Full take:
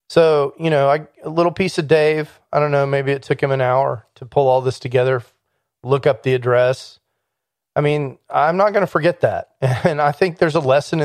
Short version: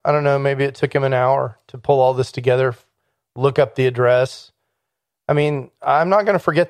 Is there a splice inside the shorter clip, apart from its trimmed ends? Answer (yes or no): no